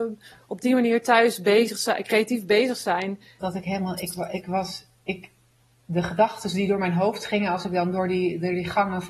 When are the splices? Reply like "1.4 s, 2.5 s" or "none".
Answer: 3.4 s